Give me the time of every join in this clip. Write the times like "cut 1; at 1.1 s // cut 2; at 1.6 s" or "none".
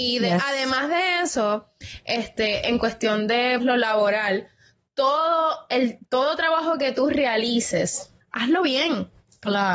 cut 1; at 3.6 s // cut 2; at 8.2 s